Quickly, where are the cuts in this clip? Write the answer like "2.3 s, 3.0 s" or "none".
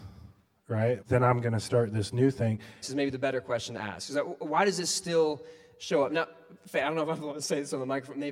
1.0 s, 2.8 s